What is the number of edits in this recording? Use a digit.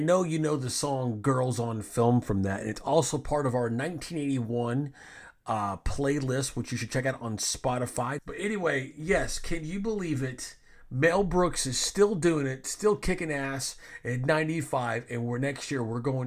1